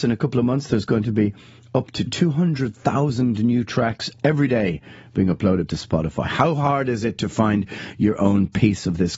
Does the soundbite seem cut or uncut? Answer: uncut